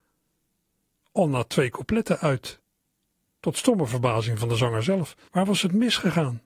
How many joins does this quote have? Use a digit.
1